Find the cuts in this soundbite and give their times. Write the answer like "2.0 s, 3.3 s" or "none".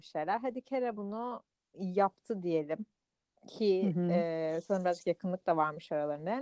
none